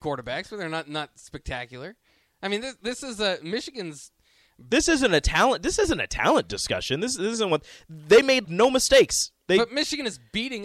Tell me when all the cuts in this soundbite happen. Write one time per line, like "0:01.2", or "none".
0:08.4